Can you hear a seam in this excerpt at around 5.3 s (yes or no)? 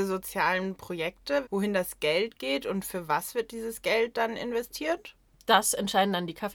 no